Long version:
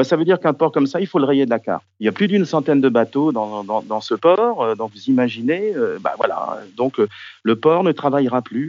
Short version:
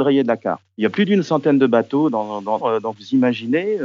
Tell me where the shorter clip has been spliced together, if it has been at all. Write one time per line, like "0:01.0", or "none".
0:02.6